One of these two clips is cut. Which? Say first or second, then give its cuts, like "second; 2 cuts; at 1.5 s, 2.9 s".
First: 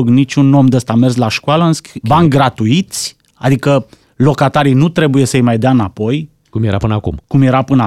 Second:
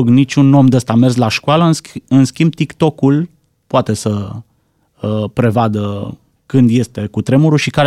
first; 1 cut; at 2.0 s